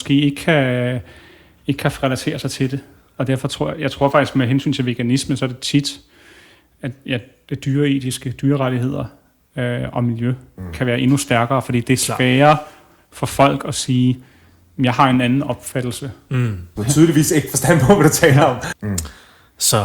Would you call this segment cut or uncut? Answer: cut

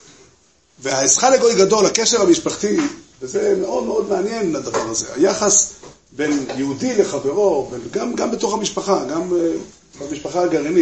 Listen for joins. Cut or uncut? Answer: uncut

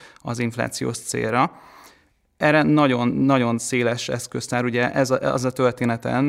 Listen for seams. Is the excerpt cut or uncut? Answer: uncut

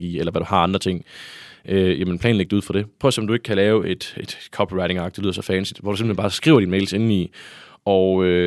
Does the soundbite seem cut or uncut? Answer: cut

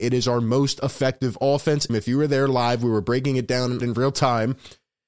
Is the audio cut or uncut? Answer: cut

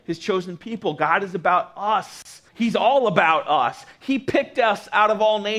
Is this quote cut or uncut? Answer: cut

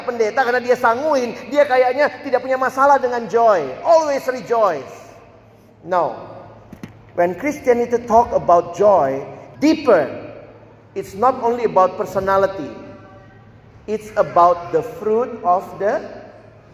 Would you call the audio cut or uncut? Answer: cut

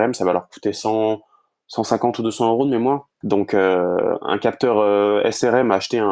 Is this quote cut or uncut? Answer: cut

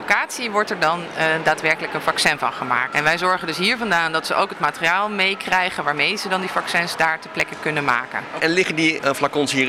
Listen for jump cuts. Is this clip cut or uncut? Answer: uncut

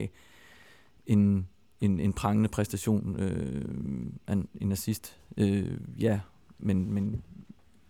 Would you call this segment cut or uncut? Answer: uncut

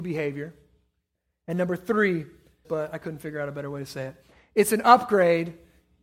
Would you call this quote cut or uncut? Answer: cut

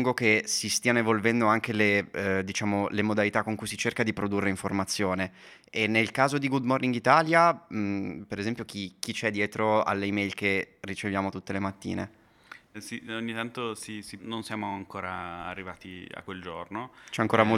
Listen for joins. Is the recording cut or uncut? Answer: cut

